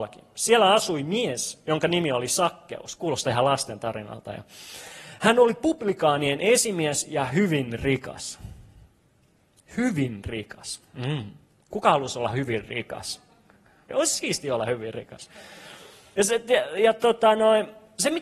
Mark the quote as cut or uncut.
cut